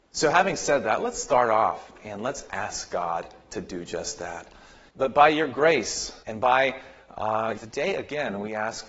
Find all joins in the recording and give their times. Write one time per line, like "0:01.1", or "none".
0:04.9
0:06.2
0:07.5